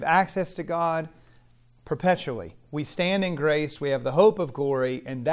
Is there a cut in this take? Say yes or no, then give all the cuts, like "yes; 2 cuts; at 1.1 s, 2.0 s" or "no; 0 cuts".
no; 0 cuts